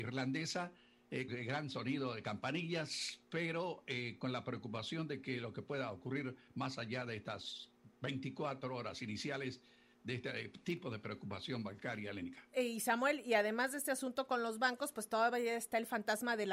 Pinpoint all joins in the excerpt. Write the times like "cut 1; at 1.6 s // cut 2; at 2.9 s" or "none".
cut 1; at 1.3 s